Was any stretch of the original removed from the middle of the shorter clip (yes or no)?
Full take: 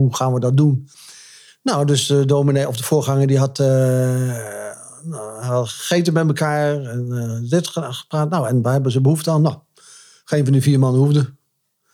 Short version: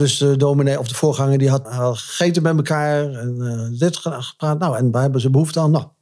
yes